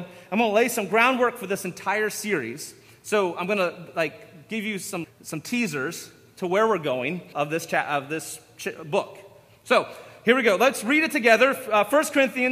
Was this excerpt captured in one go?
no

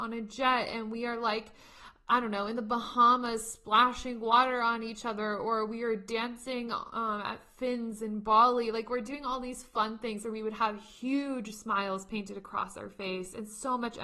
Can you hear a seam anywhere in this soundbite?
no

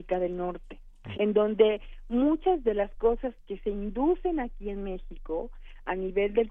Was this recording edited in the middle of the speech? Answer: yes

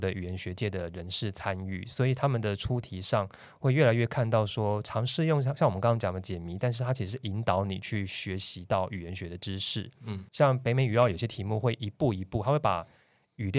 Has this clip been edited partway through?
no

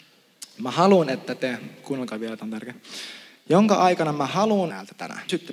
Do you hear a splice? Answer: no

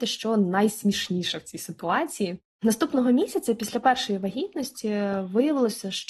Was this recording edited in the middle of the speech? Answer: yes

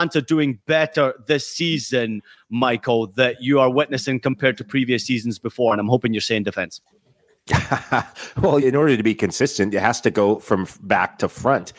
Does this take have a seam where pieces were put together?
yes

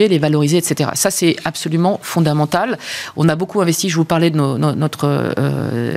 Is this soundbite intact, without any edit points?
yes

